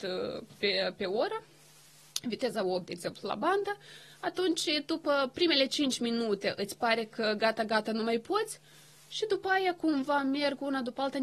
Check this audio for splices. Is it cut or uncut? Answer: uncut